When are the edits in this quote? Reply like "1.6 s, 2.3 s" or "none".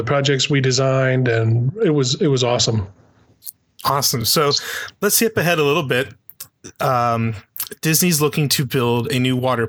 none